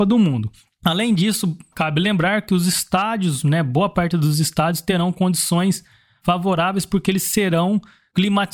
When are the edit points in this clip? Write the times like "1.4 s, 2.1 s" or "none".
none